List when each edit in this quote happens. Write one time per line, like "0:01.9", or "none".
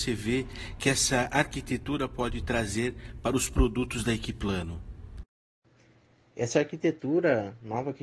none

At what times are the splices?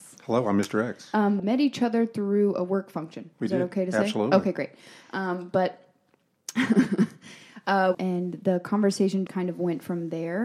0:01.4
0:07.9
0:09.3

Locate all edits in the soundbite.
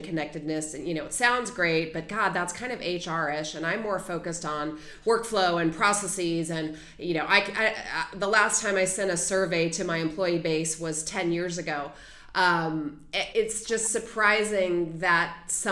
0:13.3

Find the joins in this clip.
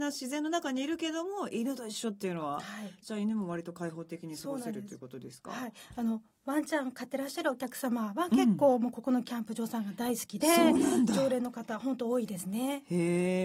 none

